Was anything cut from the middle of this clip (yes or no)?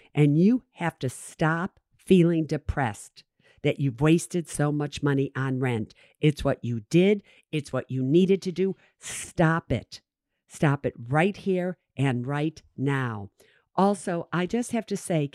no